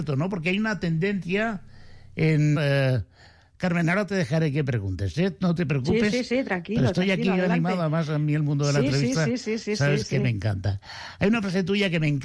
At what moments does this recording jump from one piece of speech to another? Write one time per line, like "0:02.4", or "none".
0:02.6